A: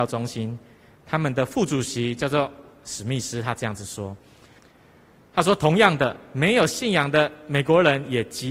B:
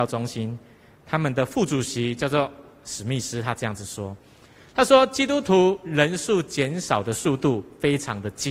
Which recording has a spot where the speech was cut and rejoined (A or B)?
A